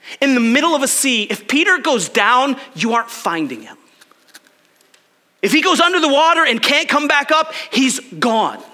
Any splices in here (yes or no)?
no